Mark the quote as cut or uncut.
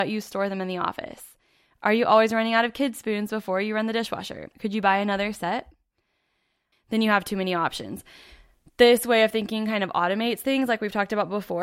cut